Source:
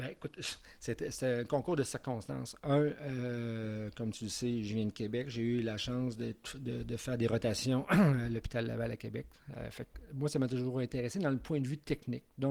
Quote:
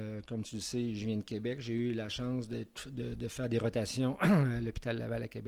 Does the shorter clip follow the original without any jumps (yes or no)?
yes